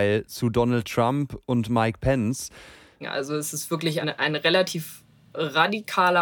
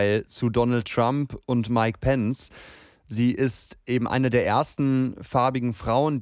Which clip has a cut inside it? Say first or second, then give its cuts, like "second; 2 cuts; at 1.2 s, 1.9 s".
first; 2 cuts; at 3.0 s, 4.0 s